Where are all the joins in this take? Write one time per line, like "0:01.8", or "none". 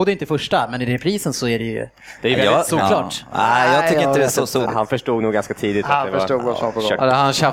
0:04.7